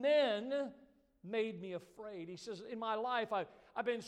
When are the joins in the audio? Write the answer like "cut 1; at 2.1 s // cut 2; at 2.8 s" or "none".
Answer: none